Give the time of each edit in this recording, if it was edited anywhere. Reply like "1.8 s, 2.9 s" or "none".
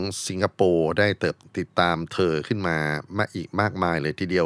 1.4 s